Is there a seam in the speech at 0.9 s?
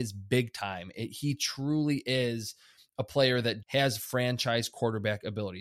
no; 1 cut; at 3.6 s

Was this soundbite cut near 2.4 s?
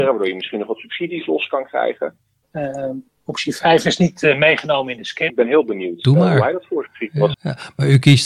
yes; 3 cuts; at 2.4 s, 5.3 s, 7.3 s

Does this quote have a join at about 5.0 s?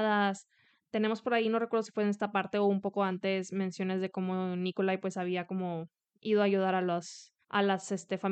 no; 1 cut; at 7.4 s

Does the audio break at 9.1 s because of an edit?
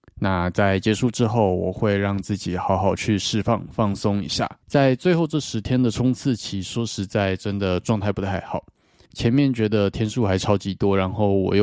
yes; 2 cuts; at 4.6 s, 9.1 s

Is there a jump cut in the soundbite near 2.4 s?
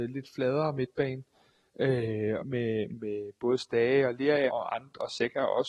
yes; 2 cuts; at 2.4 s, 4.5 s

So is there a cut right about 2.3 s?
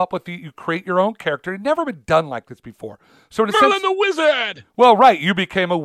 no; 0 cuts

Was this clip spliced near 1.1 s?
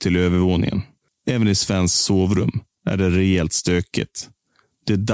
yes; 1 cut; at 1.1 s

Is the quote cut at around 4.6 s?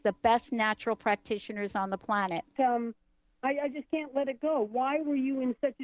no; 1 cut; at 2.6 s

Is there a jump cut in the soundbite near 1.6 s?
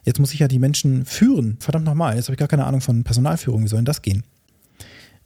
yes; 1 cut; at 1.6 s

